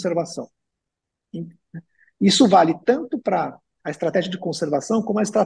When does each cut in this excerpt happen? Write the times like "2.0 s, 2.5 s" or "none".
1.7 s